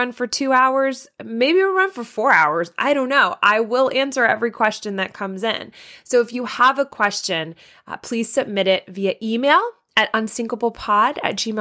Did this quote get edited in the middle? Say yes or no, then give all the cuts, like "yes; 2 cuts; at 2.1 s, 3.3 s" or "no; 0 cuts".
no; 0 cuts